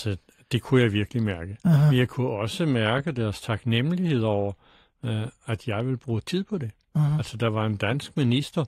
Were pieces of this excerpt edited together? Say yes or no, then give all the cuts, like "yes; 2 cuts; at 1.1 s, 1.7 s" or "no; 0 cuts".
no; 0 cuts